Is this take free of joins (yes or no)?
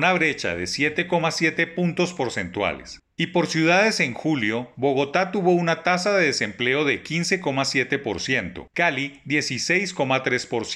no